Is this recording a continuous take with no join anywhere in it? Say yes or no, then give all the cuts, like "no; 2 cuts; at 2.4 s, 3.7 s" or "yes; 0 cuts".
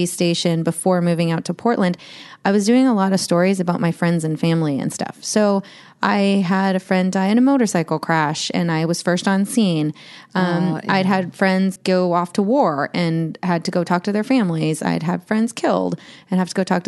no; 1 cut; at 11.8 s